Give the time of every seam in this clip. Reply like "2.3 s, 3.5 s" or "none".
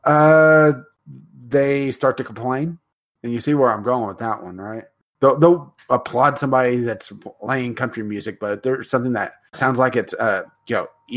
5.1 s, 9.5 s